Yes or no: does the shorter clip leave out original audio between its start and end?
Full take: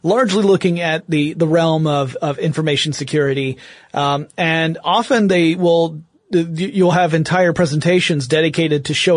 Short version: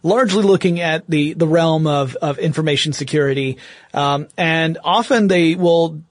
no